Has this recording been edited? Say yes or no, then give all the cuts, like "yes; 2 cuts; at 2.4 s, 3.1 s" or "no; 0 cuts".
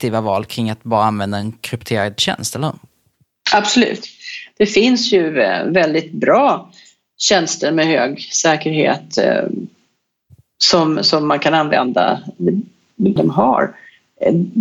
yes; 1 cut; at 13.2 s